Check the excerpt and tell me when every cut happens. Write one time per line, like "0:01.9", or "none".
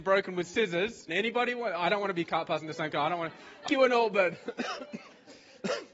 0:01.1
0:03.7

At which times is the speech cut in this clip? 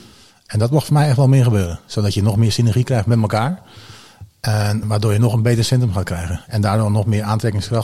0:04.8

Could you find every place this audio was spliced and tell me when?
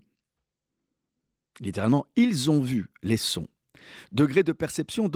none

